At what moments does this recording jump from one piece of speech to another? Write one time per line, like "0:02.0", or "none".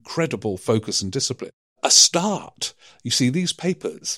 none